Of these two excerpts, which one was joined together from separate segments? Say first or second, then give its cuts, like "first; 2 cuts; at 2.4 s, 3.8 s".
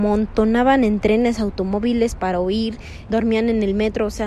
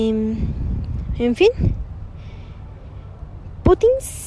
first; 1 cut; at 3.1 s